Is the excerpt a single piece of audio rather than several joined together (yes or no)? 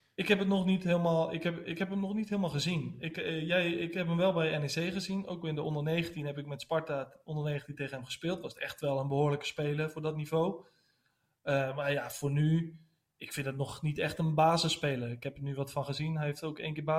yes